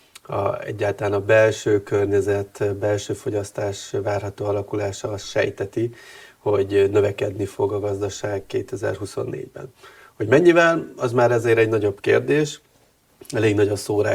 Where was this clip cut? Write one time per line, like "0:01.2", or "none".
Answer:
none